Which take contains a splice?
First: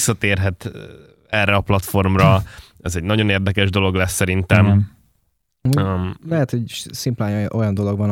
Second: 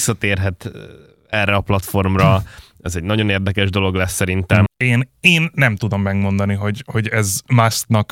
second; 1 cut; at 4.7 s

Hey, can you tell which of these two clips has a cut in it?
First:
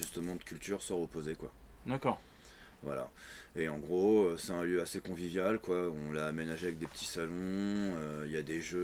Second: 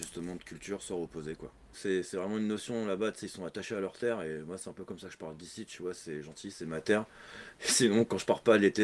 second; 1 cut; at 1.7 s

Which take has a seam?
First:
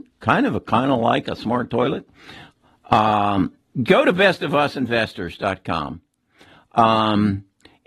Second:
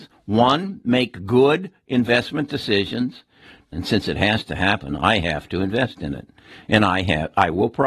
second; 1 cut; at 3.7 s

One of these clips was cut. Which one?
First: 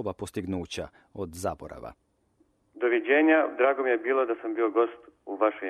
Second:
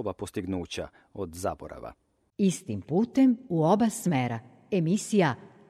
second; 1 cut; at 2.3 s

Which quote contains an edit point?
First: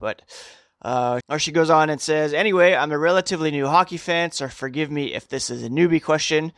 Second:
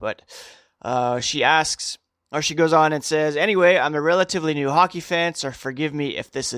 first; 1 cut; at 1.2 s

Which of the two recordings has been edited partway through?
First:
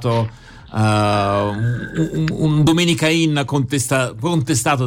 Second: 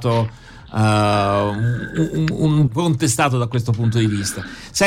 second; 1 cut; at 2.7 s

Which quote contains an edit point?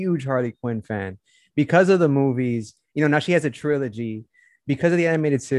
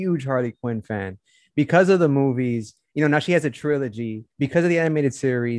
second; 1 cut; at 4.3 s

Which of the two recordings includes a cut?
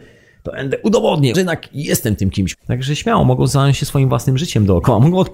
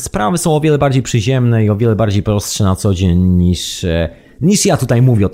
first; 2 cuts; at 1.3 s, 2.5 s

